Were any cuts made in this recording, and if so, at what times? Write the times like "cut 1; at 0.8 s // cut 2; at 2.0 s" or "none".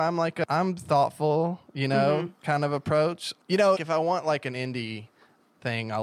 cut 1; at 3.8 s